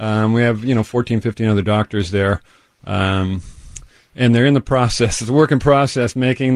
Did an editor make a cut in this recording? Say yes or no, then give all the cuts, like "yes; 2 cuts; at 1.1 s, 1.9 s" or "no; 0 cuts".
no; 0 cuts